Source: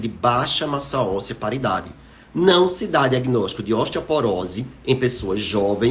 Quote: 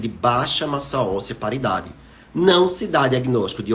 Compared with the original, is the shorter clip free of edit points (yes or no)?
yes